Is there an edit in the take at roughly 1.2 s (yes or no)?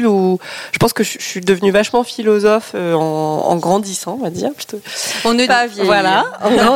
no